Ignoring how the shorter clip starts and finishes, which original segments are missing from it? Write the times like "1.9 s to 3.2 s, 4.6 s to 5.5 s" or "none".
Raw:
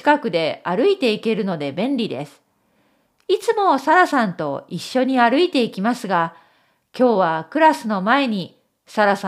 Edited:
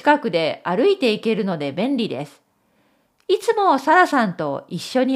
none